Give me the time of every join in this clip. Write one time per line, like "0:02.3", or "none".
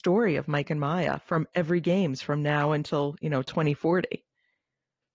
none